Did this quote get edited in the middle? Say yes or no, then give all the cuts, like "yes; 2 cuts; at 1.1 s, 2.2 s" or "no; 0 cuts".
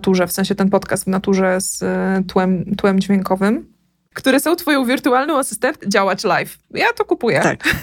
yes; 2 cuts; at 4.1 s, 5.8 s